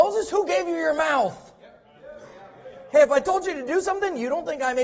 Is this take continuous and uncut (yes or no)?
yes